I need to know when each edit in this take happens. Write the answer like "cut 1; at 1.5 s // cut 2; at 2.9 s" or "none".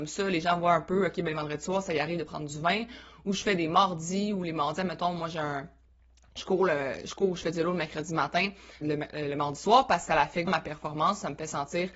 cut 1; at 8.8 s // cut 2; at 10.5 s